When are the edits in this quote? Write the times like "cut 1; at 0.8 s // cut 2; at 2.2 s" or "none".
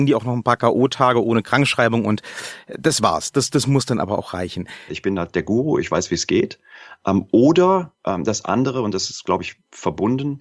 cut 1; at 4.9 s